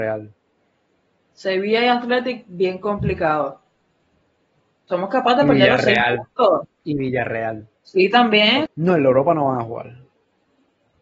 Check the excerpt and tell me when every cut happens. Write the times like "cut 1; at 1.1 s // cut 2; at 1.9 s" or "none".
cut 1; at 8.7 s